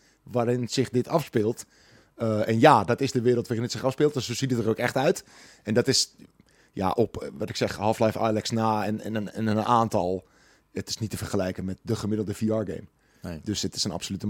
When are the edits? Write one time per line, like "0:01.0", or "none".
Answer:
none